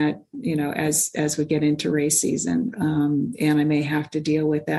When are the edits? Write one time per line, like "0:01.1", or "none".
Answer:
0:02.7

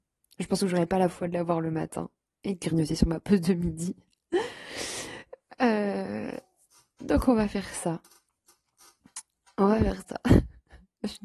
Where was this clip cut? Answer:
none

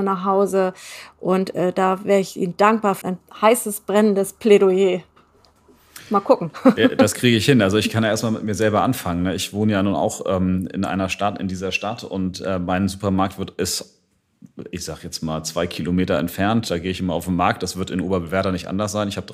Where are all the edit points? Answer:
0:03.0

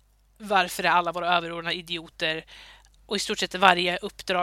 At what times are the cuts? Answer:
0:03.0

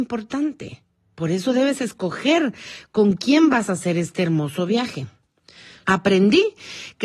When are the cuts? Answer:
0:05.8

